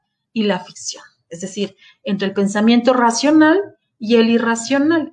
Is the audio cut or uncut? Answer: uncut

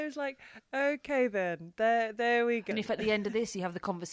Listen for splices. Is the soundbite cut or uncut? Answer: cut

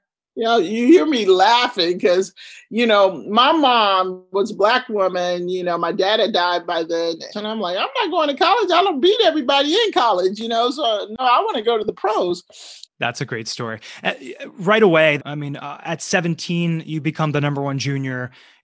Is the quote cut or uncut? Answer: cut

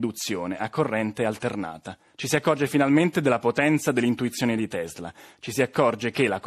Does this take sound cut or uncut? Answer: cut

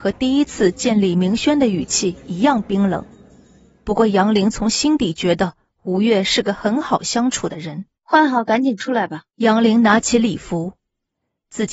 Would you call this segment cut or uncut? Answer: cut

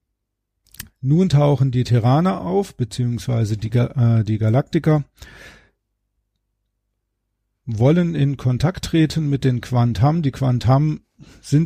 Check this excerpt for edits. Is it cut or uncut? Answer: uncut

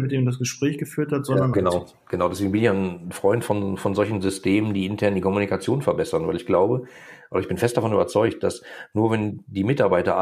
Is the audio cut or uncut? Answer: cut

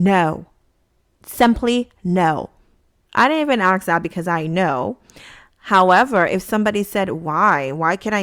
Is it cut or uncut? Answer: cut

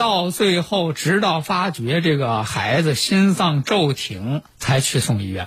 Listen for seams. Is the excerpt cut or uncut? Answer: cut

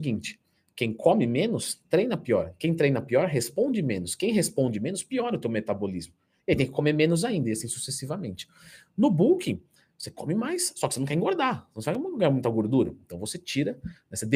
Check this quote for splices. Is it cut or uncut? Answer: uncut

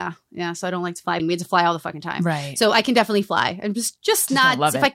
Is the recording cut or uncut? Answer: cut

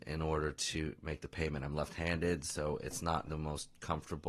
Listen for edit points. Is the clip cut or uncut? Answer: cut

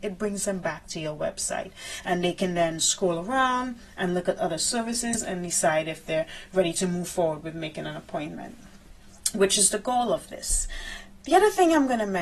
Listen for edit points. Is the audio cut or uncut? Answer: uncut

